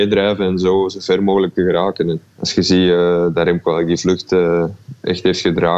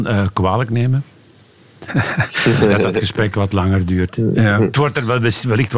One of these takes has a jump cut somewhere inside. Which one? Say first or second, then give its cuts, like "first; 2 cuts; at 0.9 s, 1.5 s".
second; 1 cut; at 1.9 s